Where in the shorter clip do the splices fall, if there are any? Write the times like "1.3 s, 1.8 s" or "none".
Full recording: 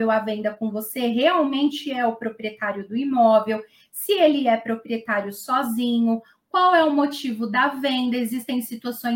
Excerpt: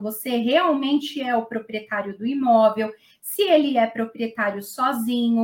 none